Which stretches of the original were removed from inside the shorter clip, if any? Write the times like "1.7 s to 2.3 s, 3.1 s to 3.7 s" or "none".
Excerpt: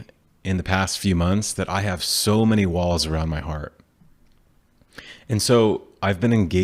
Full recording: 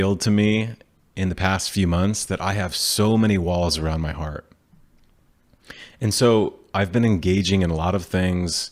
none